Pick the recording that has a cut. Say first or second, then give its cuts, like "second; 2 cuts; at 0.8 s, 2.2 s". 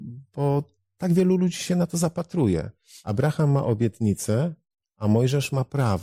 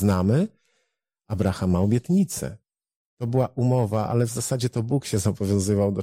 second; 1 cut; at 3.1 s